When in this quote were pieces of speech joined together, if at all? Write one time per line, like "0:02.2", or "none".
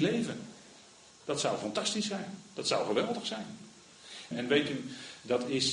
0:01.1
0:04.3